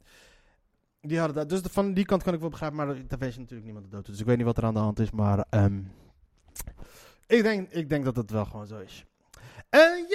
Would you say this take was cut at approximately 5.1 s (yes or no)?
no